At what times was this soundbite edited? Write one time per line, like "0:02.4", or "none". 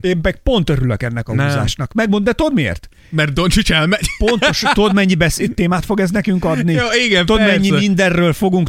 none